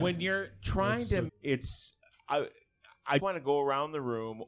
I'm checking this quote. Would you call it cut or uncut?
cut